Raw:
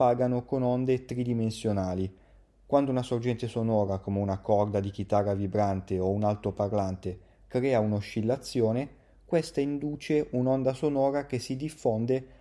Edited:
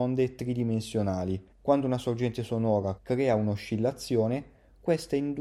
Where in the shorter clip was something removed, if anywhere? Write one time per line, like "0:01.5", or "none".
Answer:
0:01.5
0:03.0